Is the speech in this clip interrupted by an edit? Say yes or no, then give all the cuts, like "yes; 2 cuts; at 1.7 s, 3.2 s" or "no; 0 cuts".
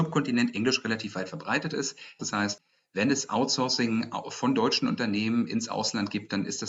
yes; 1 cut; at 2.2 s